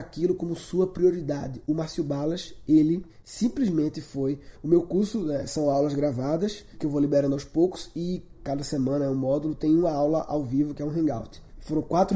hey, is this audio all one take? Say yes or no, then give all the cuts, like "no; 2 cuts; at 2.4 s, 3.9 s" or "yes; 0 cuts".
yes; 0 cuts